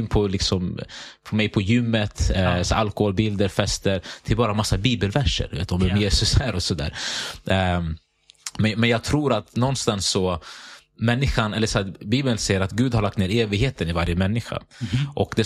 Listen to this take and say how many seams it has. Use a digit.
0